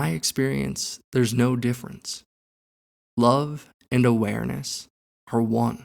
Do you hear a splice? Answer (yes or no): no